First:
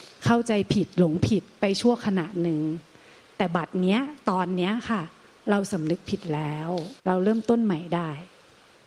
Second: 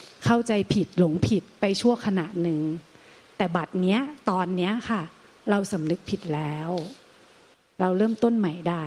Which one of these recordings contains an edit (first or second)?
first